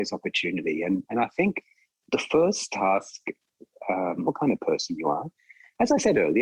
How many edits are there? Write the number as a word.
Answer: one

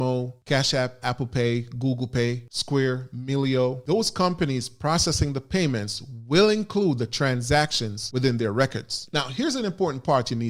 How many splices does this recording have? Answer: one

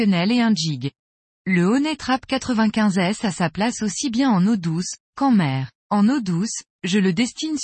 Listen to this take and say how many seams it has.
two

